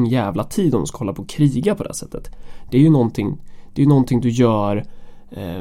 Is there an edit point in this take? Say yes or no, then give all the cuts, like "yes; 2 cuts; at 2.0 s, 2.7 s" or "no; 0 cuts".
no; 0 cuts